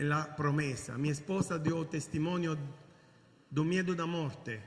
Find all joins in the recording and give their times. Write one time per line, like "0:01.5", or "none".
none